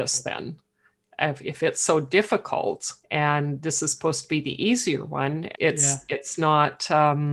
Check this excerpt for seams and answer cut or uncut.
cut